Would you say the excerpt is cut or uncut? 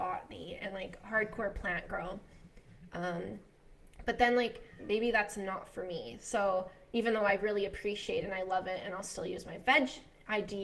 cut